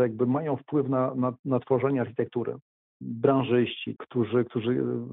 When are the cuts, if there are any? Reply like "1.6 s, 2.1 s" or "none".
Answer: 2.9 s, 4.0 s